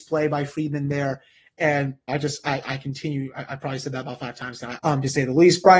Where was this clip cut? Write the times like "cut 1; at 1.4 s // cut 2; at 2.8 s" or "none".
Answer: cut 1; at 2.1 s // cut 2; at 4.8 s